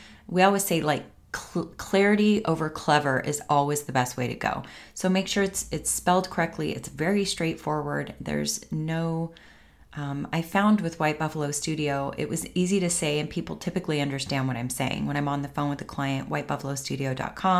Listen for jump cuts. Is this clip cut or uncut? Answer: uncut